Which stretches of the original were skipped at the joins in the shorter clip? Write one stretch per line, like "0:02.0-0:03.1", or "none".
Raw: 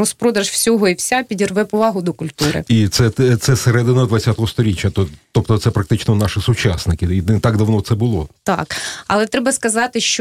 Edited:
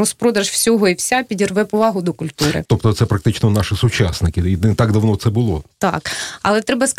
0:02.6-0:05.3